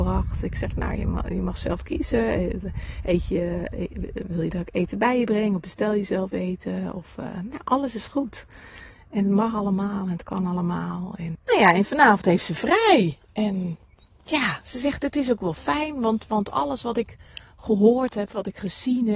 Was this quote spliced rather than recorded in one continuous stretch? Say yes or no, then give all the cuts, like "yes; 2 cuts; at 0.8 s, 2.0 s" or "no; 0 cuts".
yes; 1 cut; at 11.4 s